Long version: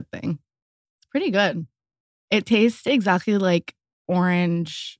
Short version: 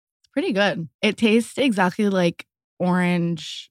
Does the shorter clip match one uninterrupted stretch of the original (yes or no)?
no